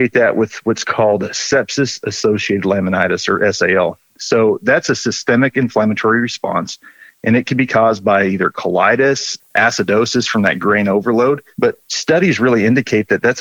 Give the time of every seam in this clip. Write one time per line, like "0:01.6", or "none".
0:09.4